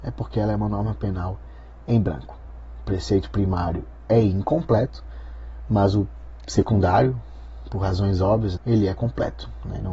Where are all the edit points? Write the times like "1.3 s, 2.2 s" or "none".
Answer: 8.6 s